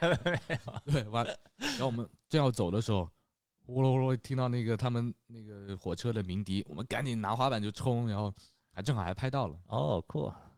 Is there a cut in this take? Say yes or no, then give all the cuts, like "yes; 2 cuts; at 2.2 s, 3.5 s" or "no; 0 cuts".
no; 0 cuts